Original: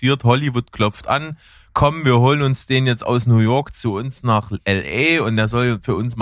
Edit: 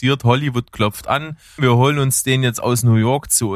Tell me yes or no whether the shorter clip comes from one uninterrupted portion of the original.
no